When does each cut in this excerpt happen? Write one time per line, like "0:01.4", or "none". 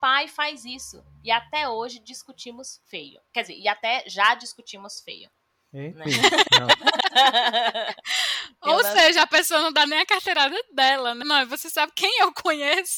0:06.1
0:11.2